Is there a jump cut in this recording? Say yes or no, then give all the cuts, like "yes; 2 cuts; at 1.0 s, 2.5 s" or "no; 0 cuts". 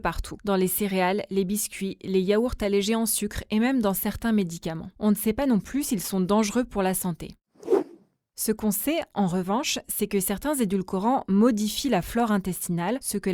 yes; 1 cut; at 4.9 s